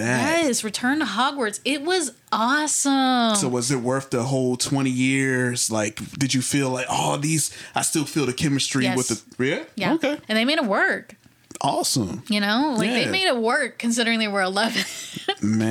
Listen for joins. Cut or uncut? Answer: cut